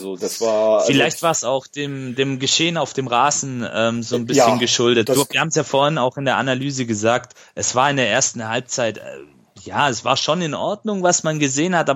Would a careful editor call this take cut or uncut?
uncut